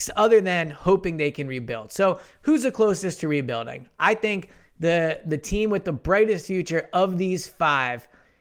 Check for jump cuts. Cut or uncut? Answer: uncut